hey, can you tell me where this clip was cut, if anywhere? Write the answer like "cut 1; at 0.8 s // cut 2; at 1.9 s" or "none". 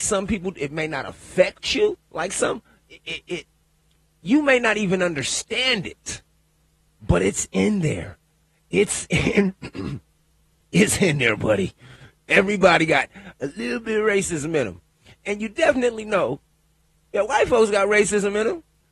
none